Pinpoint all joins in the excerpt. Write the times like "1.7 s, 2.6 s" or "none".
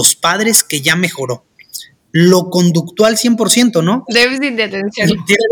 4.1 s